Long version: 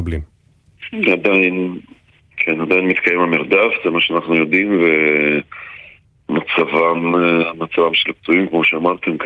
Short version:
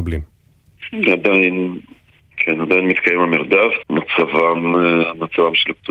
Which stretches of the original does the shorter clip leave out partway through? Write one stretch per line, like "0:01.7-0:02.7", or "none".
0:03.8-0:06.2